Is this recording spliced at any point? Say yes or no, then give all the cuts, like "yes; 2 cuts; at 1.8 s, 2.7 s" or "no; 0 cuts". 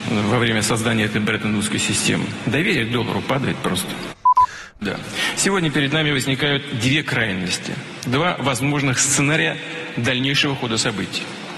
yes; 1 cut; at 4.8 s